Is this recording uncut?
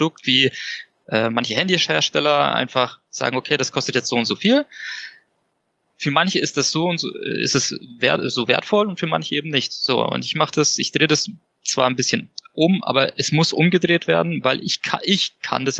yes; 0 cuts

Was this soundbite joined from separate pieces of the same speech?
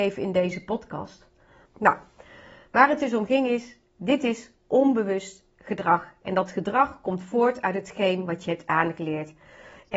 yes; 1 cut; at 1.7 s

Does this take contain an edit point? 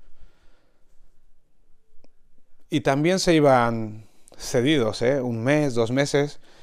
no; 0 cuts

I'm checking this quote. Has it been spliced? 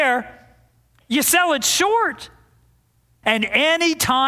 yes; 1 cut; at 3.2 s

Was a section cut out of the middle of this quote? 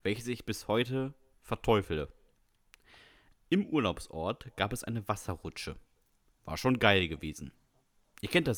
no; 0 cuts

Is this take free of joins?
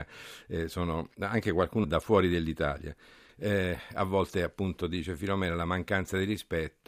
no; 2 cuts; at 1.8 s, 3.3 s

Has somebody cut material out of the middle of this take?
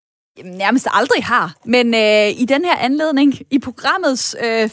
no; 0 cuts

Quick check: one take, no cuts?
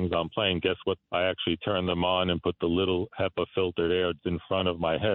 no; 2 cuts; at 1.0 s, 4.2 s

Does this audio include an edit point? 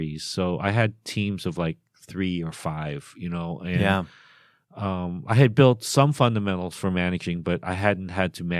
no; 0 cuts

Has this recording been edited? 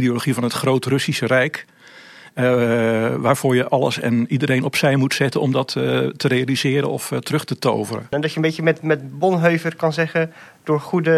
yes; 1 cut; at 8.1 s

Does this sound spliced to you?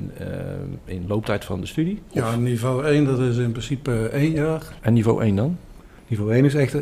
yes; 2 cuts; at 2.1 s, 4.8 s

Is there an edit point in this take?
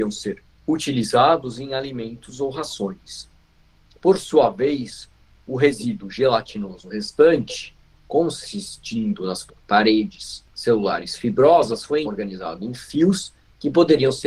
yes; 1 cut; at 12.0 s

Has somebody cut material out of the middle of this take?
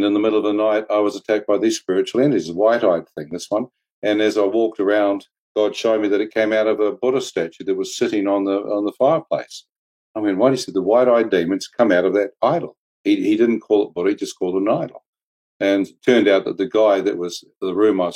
no; 0 cuts

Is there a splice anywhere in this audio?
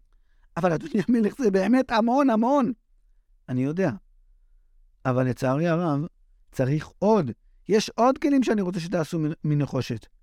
yes; 1 cut; at 6.4 s

